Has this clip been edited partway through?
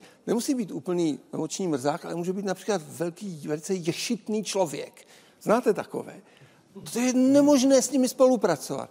no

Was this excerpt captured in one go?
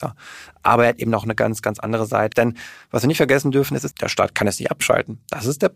no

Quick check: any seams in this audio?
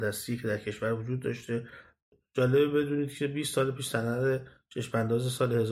no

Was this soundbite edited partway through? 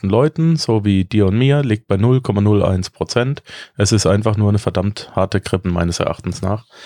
yes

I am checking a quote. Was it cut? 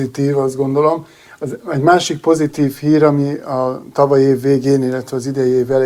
no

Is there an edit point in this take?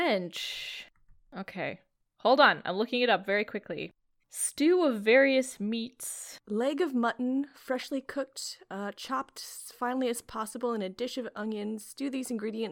no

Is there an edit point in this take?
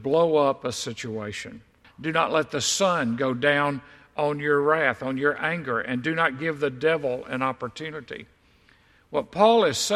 yes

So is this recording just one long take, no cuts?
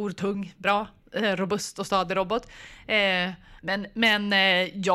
yes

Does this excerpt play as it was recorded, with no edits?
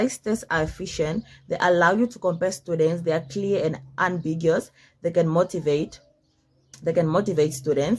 yes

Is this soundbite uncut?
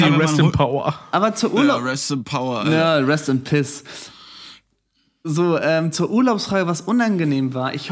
yes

